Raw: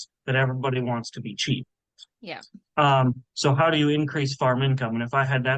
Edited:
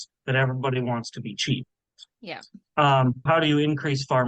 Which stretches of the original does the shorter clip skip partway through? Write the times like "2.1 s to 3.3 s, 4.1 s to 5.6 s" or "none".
3.3 s to 3.6 s